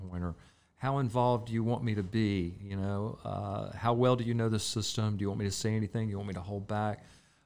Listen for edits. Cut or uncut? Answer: uncut